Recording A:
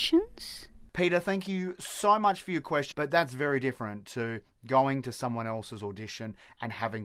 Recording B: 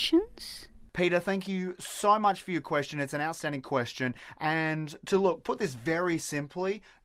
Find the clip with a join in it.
A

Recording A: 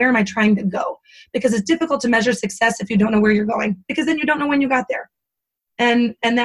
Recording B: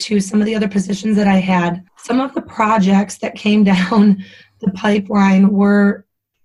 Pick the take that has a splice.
B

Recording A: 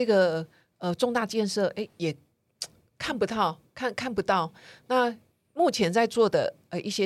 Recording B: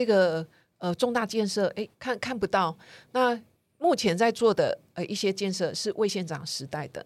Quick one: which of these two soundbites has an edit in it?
B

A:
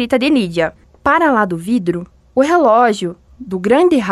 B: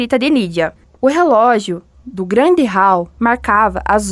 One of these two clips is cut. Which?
B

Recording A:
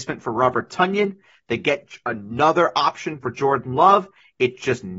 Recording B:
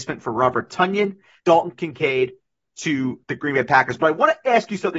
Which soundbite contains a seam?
B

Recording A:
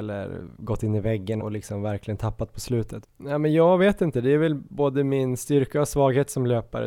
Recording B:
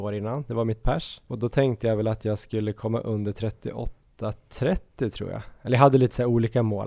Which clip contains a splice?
A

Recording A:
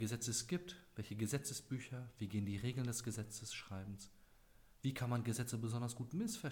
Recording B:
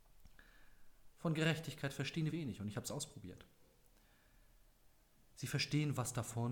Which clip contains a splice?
B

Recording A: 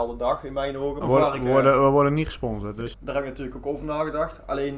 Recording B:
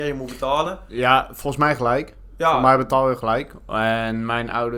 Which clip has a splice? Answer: A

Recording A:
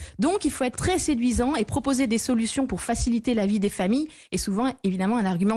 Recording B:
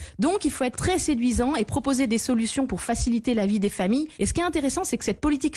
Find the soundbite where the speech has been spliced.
B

